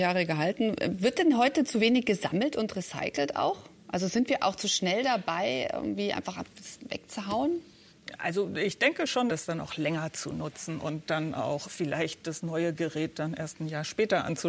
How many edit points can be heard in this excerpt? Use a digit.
2